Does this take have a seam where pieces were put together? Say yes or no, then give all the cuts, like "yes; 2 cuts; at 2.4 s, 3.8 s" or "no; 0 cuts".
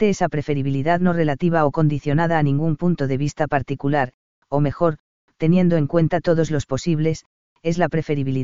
no; 0 cuts